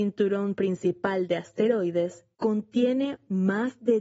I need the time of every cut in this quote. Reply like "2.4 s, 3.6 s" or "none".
2.3 s